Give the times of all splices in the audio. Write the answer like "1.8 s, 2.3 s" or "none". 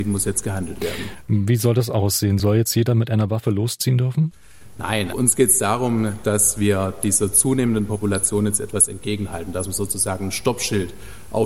2.4 s, 5.1 s